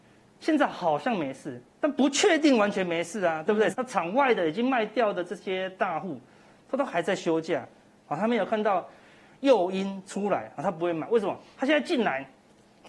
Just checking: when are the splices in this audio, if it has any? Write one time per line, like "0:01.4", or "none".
0:03.7